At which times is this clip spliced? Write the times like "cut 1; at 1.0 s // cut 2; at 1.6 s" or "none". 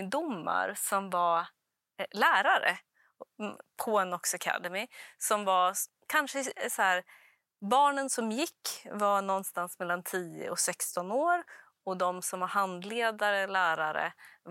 none